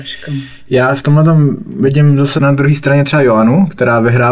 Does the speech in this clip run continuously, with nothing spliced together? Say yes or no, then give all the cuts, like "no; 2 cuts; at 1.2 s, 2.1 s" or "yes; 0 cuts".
no; 1 cut; at 2.4 s